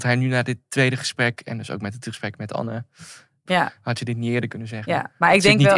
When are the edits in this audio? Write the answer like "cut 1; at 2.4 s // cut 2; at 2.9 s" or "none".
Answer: cut 1; at 3.5 s